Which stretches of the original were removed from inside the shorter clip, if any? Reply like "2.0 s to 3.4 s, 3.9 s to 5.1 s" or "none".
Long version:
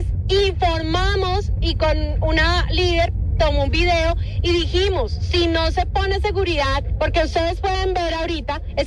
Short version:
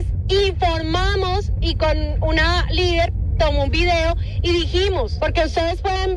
5.2 s to 7.0 s

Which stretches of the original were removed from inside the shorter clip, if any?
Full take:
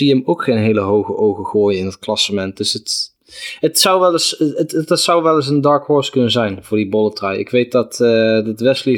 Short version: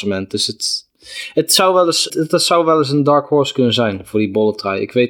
4.4 s to 4.7 s

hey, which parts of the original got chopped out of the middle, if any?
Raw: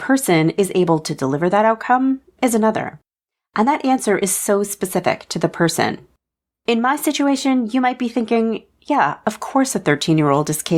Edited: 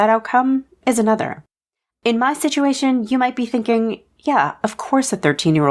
3.5 s to 6.5 s

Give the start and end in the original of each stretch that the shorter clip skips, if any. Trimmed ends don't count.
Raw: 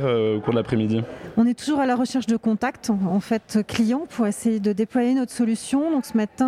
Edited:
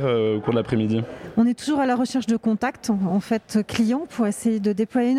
none

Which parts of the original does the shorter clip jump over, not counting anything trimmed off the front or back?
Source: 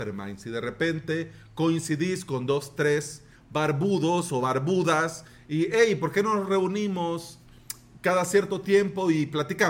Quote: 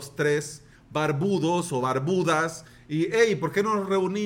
none

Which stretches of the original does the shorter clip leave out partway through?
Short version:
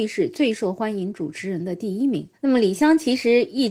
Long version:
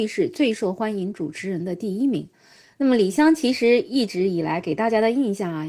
2.4 s to 2.7 s

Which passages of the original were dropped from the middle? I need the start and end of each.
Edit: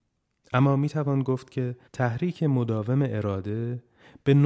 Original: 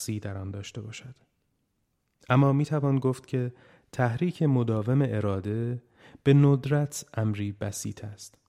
3.6 s to 3.9 s

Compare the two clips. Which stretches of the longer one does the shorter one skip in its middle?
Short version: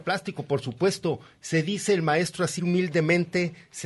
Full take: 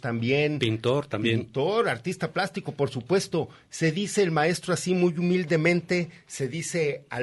4.9 s to 5.1 s

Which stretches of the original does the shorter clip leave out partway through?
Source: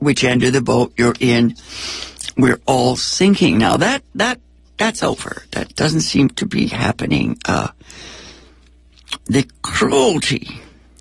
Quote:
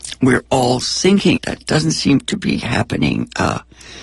3.5 s to 5.5 s

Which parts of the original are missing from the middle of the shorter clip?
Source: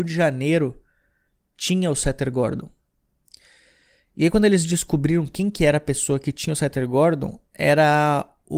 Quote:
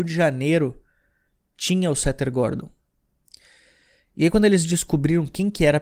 none

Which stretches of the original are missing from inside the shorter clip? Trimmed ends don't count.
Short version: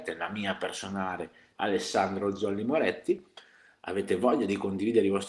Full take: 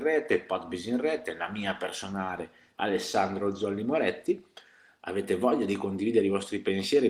none

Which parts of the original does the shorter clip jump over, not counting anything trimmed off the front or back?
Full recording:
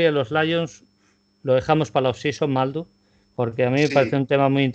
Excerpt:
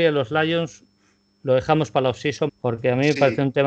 2.5 s to 3.2 s

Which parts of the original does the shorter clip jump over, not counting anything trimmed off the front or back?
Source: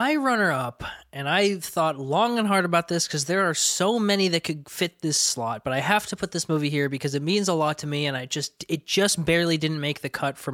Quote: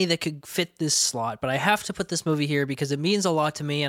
none

